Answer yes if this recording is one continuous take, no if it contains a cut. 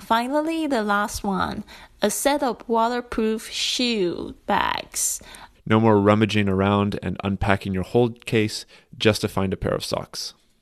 no